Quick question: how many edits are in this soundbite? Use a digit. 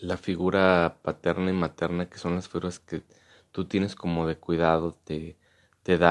0